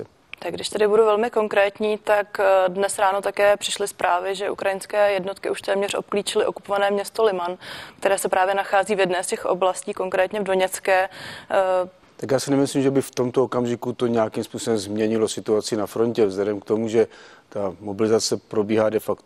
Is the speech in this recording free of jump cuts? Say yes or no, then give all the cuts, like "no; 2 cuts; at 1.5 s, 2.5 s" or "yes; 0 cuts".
no; 1 cut; at 12.0 s